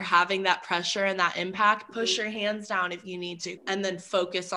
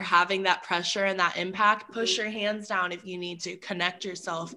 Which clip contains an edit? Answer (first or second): first